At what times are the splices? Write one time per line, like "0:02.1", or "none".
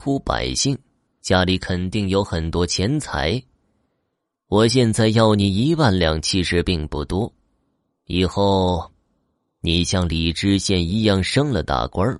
0:01.1